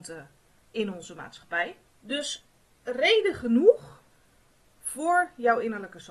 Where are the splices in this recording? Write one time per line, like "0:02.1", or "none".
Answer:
0:01.9